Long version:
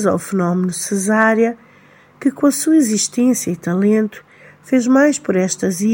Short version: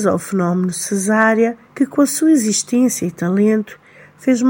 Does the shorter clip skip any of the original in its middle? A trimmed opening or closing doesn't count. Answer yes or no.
yes